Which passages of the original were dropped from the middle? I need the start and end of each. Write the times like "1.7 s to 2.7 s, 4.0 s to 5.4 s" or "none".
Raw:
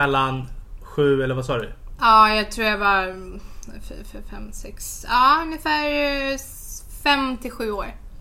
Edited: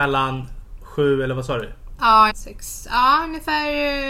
2.3 s to 4.5 s